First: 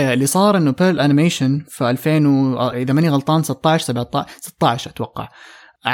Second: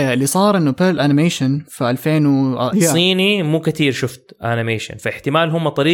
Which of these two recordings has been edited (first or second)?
second